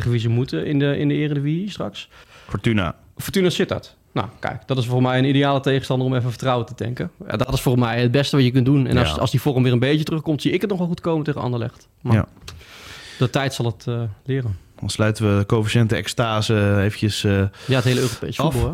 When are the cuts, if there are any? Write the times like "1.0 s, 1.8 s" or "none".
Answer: 2.2 s